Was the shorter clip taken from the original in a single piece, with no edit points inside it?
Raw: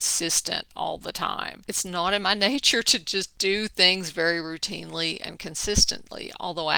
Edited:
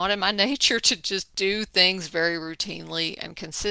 yes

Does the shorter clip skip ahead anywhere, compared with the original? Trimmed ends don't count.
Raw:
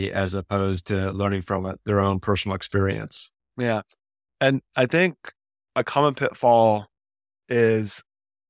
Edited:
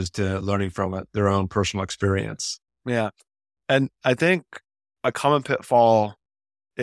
no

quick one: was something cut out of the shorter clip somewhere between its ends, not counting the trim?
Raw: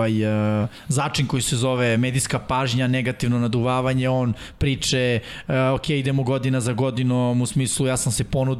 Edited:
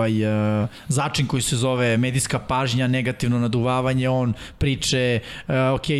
no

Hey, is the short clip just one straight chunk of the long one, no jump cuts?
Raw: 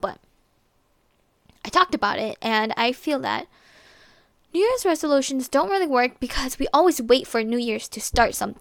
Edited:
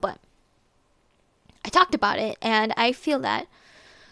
yes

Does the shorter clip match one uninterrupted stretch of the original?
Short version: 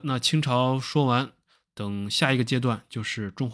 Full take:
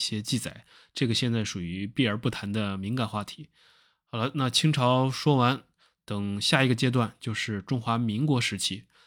yes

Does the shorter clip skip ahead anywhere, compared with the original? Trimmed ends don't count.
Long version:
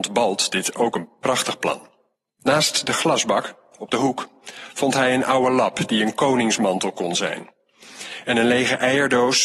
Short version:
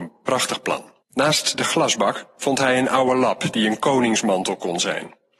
yes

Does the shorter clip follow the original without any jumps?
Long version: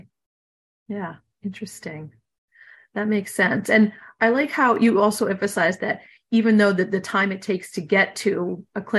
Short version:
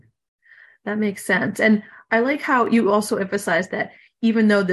yes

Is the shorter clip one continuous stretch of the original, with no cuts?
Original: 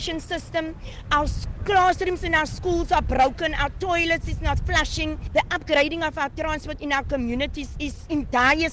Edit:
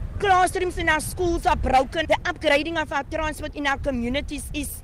no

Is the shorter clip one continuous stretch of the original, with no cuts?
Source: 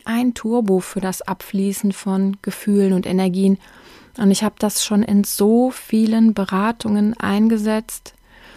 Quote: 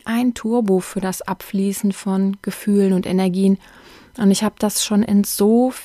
yes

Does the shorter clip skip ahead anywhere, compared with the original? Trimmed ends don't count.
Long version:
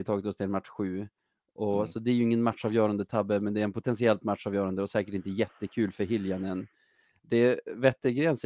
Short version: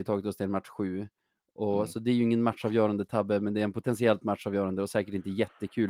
no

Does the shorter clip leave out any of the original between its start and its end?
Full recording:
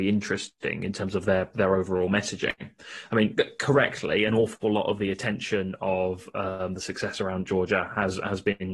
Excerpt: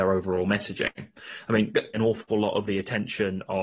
yes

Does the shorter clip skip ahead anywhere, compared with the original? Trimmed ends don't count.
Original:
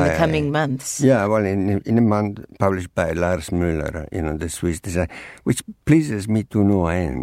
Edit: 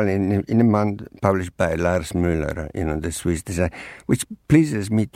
no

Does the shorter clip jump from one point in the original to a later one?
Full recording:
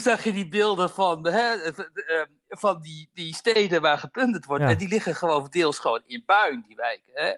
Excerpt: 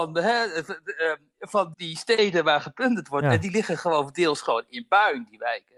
yes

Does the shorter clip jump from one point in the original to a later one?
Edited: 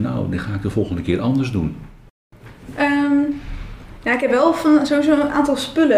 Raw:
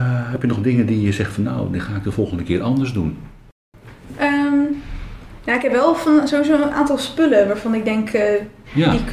no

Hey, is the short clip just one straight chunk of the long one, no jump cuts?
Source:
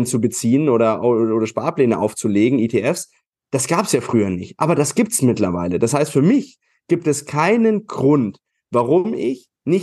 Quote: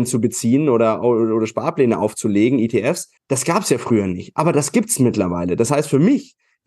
no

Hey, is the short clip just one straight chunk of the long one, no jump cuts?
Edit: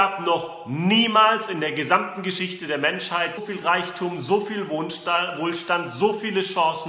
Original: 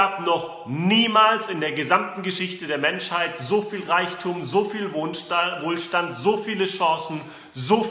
no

